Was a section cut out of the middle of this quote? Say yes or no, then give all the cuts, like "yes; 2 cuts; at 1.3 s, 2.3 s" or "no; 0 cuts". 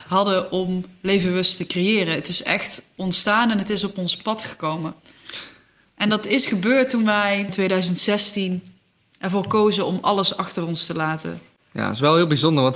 no; 0 cuts